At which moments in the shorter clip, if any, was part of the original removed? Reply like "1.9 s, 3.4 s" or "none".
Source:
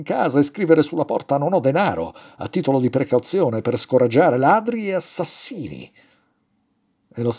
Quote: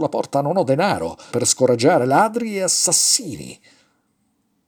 1.3 s